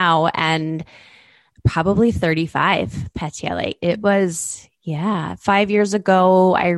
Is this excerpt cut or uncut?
uncut